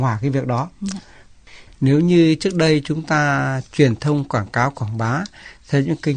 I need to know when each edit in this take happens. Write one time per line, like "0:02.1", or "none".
0:01.7